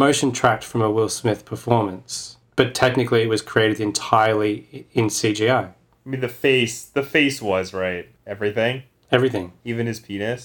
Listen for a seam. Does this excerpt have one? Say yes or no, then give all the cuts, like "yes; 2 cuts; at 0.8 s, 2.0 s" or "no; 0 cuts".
yes; 1 cut; at 8.2 s